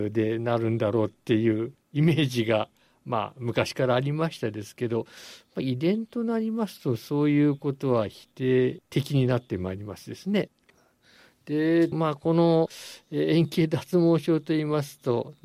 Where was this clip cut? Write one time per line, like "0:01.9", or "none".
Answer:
0:10.7
0:11.9